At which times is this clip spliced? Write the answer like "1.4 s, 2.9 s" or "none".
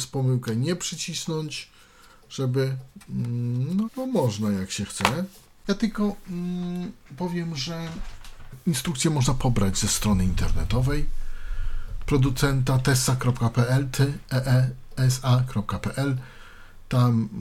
3.8 s